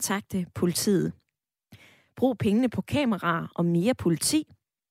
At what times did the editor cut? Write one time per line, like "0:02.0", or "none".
0:02.1